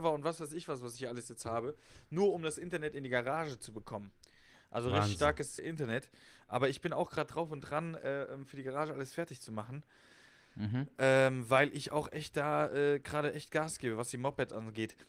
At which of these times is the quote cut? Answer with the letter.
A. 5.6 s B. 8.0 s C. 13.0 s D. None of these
A